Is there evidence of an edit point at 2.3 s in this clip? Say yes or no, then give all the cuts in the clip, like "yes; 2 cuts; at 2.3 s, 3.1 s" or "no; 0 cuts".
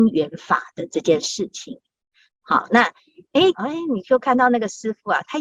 yes; 2 cuts; at 2.3 s, 3.5 s